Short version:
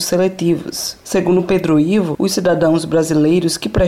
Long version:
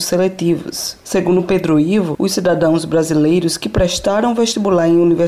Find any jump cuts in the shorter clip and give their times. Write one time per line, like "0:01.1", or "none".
none